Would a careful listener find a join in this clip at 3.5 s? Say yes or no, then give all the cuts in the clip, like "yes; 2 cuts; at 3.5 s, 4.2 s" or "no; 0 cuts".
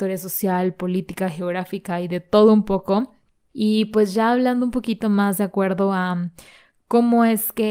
yes; 1 cut; at 3.5 s